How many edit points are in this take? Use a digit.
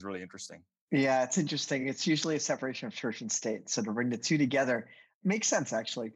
0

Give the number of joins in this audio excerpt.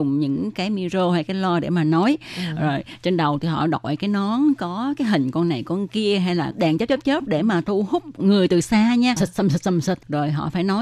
1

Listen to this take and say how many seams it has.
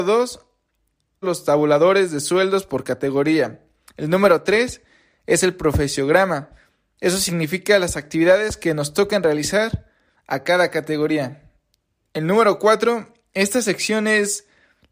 1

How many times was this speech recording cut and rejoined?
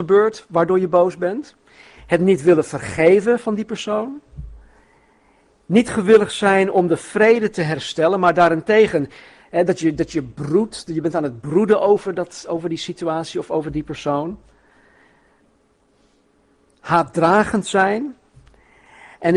0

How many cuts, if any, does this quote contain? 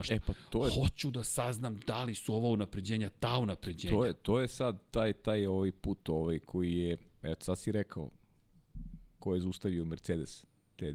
0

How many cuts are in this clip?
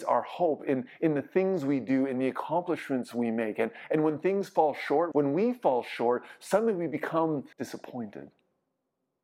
2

